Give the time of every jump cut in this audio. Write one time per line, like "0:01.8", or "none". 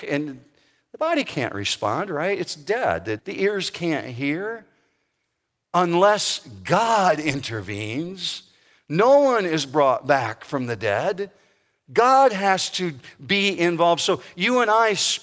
0:03.2